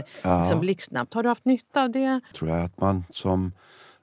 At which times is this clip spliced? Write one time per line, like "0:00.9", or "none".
0:02.3